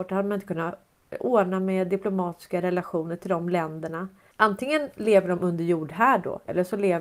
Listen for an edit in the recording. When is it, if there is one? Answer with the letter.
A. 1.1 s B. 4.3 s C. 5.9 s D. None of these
B